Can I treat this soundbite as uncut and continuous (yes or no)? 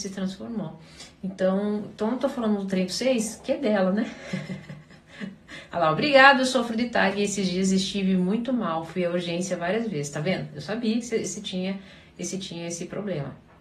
no